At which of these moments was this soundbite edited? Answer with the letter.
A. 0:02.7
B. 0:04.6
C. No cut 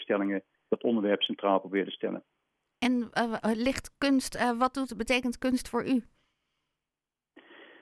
C